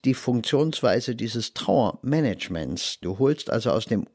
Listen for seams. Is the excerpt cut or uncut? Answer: cut